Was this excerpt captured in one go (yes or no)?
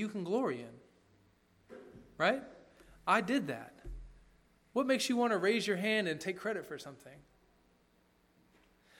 yes